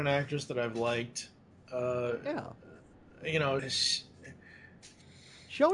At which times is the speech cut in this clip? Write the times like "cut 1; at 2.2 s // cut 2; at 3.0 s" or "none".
cut 1; at 3.6 s